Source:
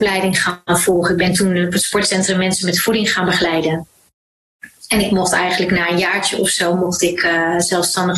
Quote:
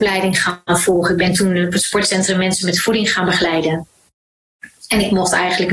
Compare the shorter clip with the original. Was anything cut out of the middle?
no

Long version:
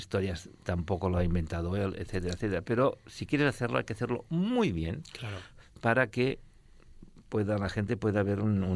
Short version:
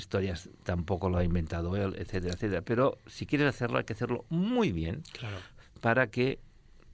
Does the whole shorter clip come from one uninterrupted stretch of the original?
yes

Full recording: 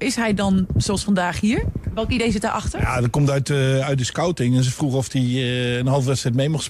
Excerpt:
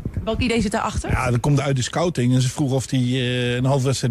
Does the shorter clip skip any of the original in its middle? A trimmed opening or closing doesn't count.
yes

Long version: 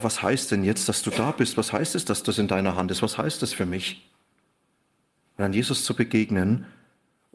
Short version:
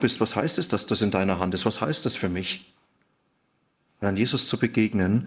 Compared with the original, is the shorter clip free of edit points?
yes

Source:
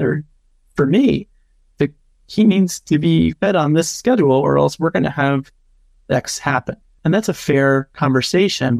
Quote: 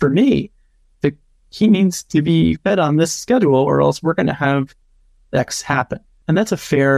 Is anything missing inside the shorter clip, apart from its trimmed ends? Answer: no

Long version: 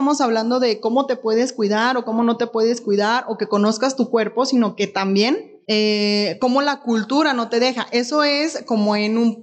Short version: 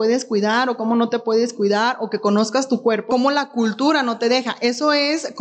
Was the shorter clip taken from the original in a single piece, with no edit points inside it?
no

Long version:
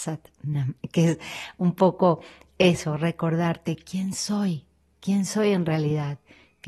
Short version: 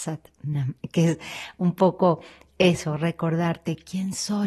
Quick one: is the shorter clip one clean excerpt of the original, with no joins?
yes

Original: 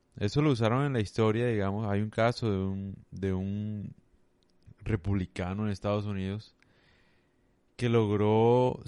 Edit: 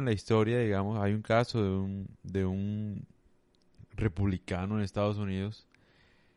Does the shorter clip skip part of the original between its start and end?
no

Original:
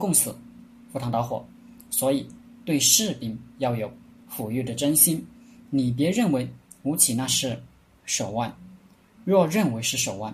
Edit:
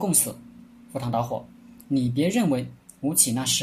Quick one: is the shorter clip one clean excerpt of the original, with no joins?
no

